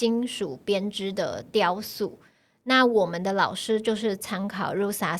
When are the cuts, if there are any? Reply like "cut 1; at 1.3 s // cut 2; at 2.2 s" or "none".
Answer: none